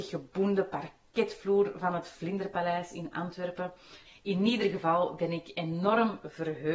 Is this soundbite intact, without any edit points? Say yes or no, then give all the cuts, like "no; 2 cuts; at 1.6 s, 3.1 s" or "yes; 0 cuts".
no; 1 cut; at 4.1 s